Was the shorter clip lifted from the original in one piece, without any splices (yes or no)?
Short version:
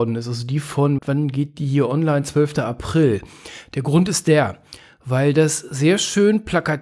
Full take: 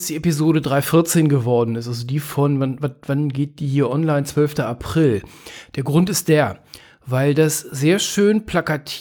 no